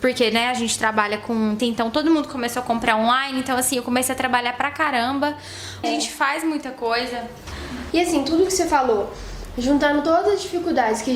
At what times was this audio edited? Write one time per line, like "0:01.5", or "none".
0:01.6
0:05.8
0:07.9